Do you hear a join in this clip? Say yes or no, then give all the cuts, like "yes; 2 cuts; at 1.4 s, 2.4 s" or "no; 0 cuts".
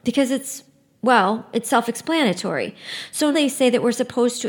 yes; 1 cut; at 3.3 s